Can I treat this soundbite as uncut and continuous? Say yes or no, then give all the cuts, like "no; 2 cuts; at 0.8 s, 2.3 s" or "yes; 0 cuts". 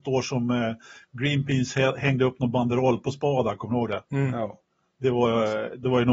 no; 1 cut; at 4.1 s